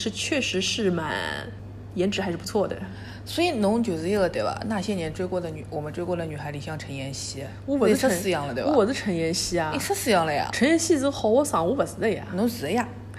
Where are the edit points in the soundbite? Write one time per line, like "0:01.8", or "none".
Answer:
none